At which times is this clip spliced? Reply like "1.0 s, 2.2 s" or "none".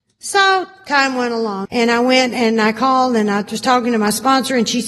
1.6 s